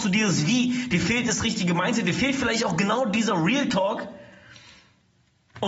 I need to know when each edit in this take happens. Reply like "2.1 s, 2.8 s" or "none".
none